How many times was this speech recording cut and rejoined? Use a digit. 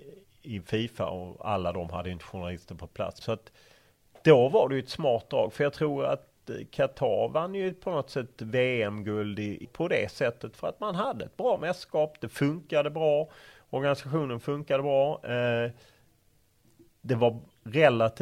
2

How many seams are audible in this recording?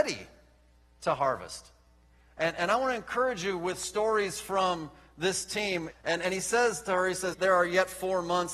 2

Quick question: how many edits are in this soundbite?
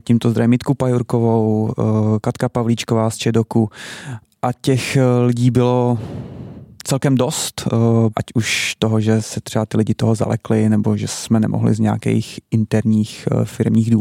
1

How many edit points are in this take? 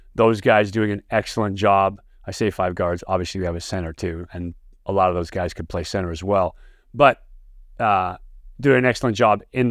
0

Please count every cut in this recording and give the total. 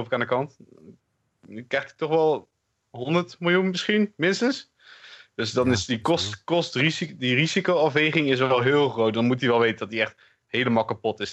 0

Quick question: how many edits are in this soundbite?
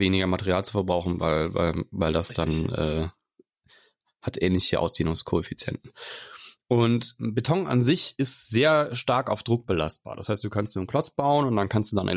1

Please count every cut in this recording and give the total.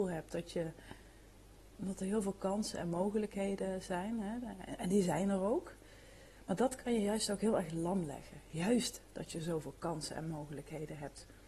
0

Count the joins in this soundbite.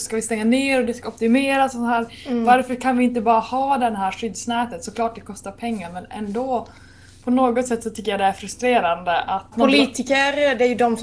1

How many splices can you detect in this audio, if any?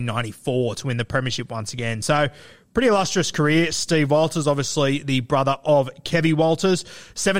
0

